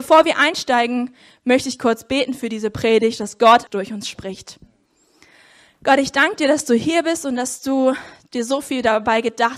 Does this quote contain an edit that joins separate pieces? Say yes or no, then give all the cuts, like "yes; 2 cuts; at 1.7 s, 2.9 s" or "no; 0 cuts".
yes; 1 cut; at 3.7 s